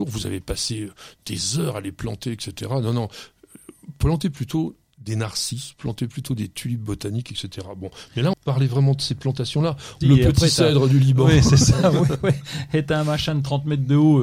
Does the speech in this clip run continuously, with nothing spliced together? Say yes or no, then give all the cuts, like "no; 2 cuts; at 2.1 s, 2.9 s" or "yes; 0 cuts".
no; 2 cuts; at 8.3 s, 10.0 s